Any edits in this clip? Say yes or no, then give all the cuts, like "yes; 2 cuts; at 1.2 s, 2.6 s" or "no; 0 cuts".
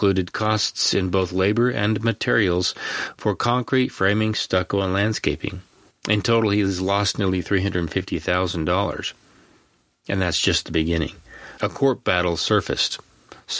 yes; 1 cut; at 11.6 s